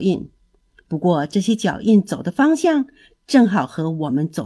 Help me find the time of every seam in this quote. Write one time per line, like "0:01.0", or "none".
none